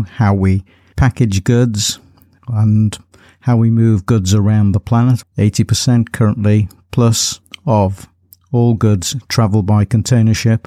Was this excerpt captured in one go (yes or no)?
no